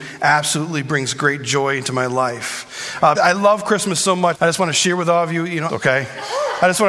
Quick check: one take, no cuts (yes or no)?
no